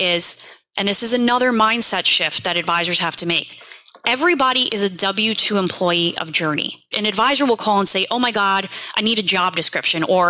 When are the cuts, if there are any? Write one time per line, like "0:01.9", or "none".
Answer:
0:06.9